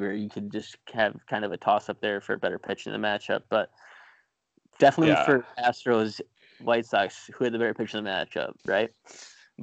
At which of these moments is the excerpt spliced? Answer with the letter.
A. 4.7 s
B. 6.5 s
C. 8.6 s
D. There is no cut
C